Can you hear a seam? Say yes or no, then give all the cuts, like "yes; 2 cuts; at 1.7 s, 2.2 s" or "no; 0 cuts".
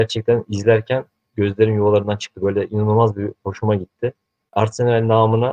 no; 0 cuts